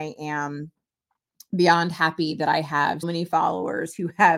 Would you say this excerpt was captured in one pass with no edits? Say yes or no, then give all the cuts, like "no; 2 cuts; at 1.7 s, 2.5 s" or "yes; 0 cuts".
no; 1 cut; at 3.0 s